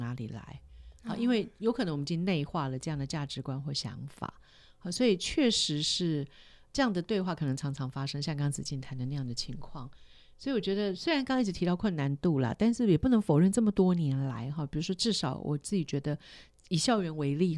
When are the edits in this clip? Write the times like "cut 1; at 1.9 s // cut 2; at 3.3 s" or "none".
none